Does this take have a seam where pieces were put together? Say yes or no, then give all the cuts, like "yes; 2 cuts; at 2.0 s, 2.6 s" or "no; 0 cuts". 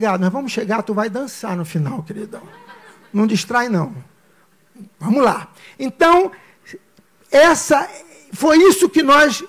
no; 0 cuts